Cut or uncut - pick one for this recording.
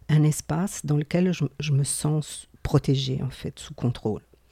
uncut